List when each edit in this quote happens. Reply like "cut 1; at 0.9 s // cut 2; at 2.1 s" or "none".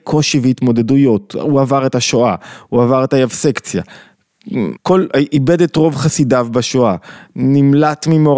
cut 1; at 4.8 s